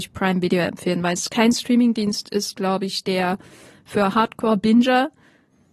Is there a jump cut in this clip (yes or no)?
no